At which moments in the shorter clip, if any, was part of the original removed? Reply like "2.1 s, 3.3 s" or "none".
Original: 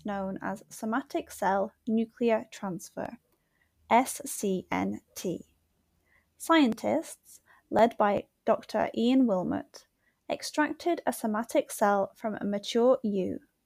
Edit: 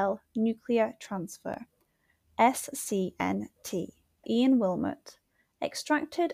4.2 s